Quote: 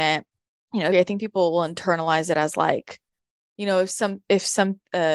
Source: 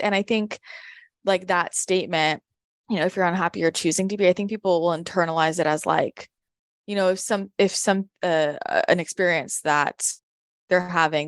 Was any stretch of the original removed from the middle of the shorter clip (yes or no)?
yes